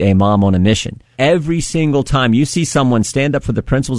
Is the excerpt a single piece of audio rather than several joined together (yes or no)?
no